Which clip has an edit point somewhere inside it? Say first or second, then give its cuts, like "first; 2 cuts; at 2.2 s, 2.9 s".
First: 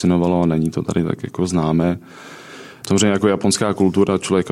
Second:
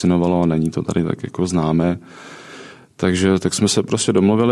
first; 1 cut; at 2.8 s